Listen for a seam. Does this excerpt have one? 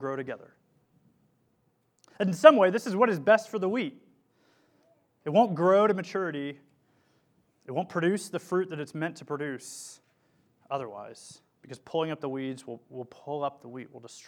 no; 0 cuts

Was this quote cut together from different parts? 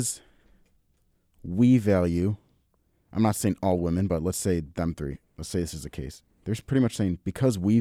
no; 0 cuts

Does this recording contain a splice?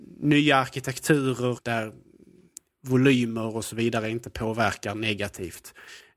yes; 1 cut; at 1.6 s

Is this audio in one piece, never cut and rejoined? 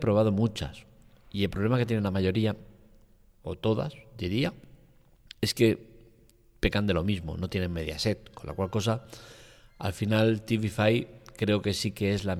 yes; 0 cuts

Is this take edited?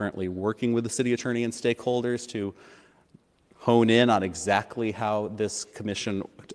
no; 0 cuts

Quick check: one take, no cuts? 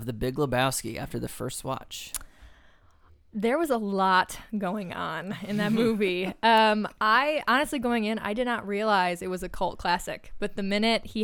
yes; 0 cuts

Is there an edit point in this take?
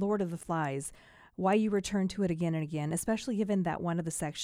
no; 0 cuts

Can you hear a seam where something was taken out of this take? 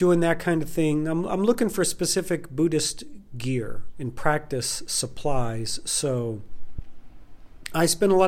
yes; 1 cut; at 3.9 s

